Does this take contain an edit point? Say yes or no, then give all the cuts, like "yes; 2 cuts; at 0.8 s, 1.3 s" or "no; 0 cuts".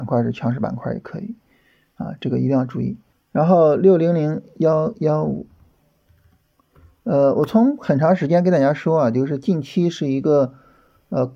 yes; 1 cut; at 3.1 s